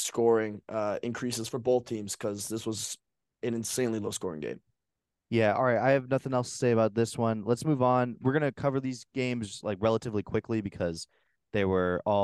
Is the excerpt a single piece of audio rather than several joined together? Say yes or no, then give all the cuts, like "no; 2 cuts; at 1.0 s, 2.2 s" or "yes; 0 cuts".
yes; 0 cuts